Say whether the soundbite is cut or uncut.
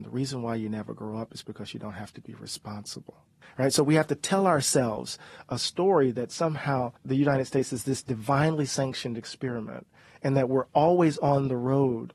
cut